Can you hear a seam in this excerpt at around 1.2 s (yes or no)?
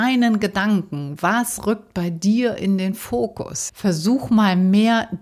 no